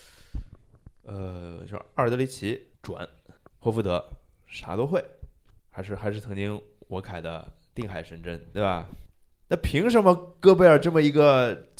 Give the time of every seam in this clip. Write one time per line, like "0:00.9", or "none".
none